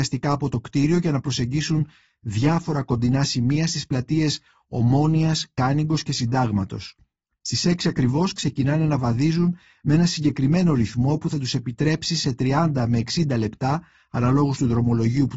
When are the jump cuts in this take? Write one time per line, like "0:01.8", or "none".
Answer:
none